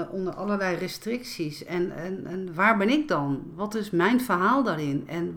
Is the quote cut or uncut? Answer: uncut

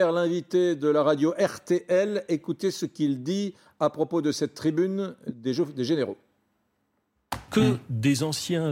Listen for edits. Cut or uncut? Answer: uncut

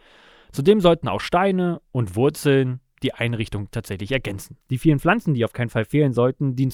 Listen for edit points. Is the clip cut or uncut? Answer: cut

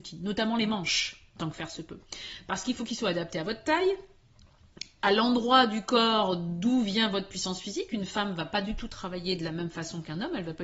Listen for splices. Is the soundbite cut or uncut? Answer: uncut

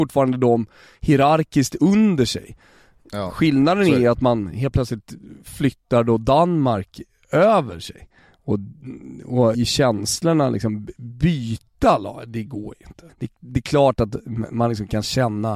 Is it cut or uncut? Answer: cut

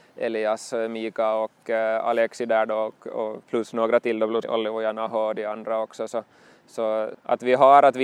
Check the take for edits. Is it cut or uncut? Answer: cut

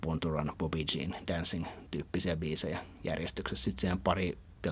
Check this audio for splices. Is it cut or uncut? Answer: uncut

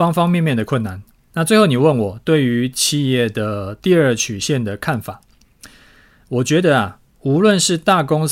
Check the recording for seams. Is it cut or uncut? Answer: cut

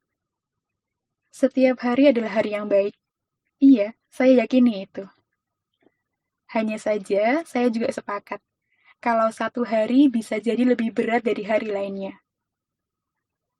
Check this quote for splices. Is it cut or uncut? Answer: uncut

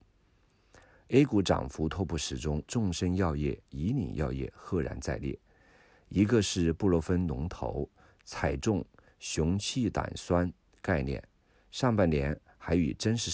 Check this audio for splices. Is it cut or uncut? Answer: cut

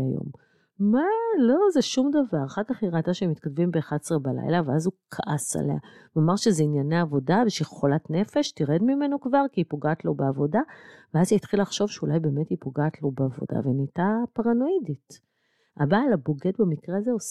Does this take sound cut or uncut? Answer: uncut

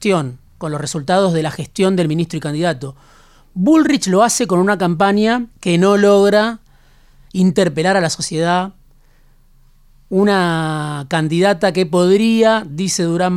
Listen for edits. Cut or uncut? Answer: cut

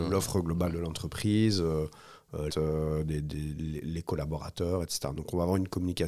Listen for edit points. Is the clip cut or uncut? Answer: cut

